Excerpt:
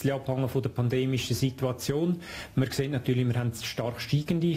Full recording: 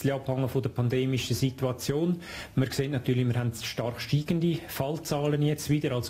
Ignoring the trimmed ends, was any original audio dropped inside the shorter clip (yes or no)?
no